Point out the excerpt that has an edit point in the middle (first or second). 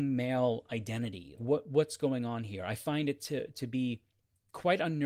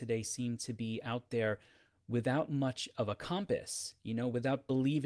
first